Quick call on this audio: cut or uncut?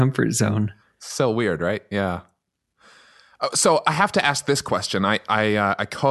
uncut